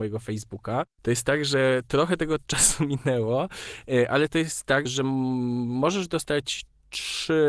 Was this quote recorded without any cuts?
no; 1 cut; at 4.8 s

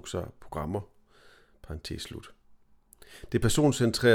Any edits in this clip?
no; 0 cuts

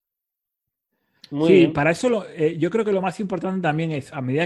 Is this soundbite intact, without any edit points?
yes; 0 cuts

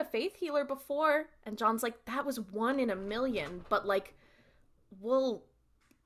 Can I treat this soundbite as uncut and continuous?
yes; 0 cuts

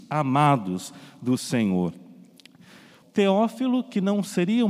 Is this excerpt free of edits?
no; 1 cut; at 3.0 s

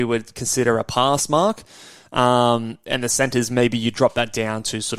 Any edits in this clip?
no; 0 cuts

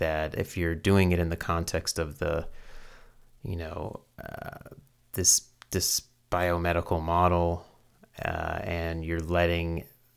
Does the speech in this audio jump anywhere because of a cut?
no; 0 cuts

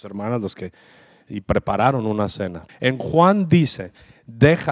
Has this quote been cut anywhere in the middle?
yes; 1 cut; at 2.7 s

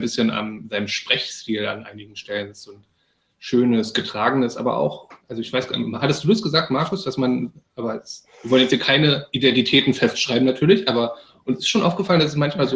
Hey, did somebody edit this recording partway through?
no; 0 cuts

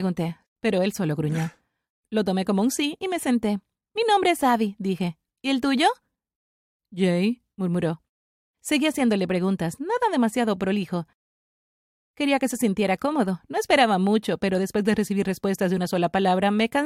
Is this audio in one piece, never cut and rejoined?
yes; 0 cuts

